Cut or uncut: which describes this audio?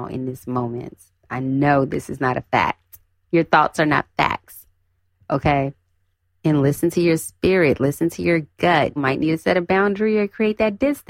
cut